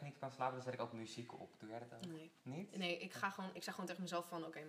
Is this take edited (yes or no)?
yes